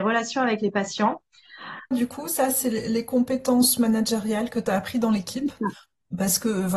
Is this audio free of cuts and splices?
no; 1 cut; at 1.9 s

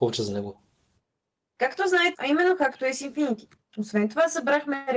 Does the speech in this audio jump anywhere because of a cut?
yes; 2 cuts; at 2.1 s, 3.7 s

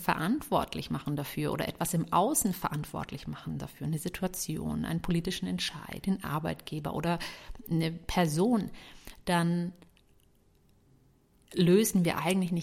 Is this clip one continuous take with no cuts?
yes; 0 cuts

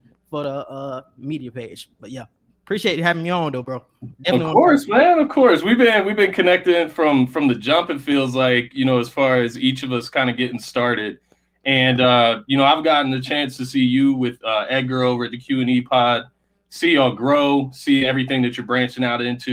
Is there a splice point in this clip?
no; 0 cuts

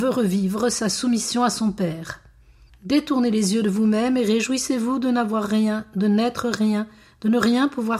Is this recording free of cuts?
no; 1 cut; at 2.7 s

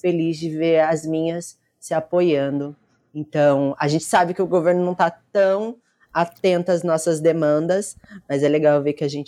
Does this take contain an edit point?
no; 0 cuts

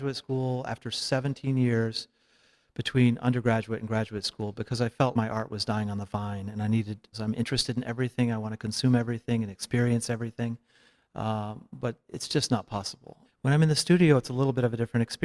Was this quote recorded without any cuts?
no; 3 cuts; at 5.1 s, 7.1 s, 13.2 s

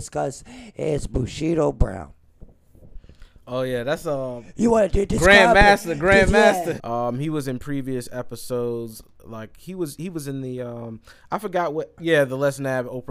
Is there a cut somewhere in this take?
yes; 2 cuts; at 6.8 s, 12.0 s

